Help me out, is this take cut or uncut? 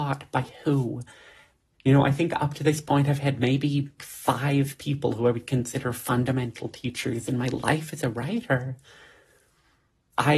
cut